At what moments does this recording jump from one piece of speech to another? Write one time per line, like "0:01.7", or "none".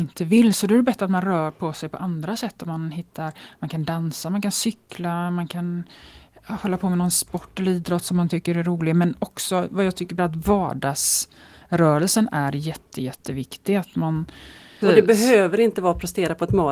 0:10.2
0:14.8